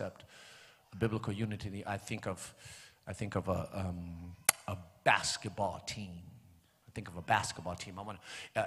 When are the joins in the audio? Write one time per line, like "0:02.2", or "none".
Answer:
none